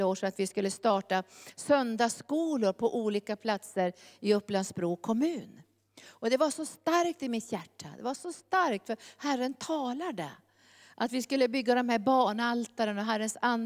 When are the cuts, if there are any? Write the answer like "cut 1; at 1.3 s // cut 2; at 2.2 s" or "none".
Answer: none